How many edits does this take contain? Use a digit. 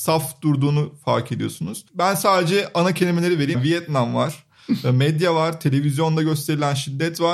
1